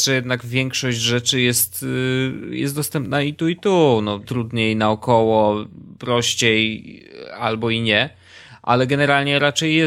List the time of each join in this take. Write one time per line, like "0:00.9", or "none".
0:04.2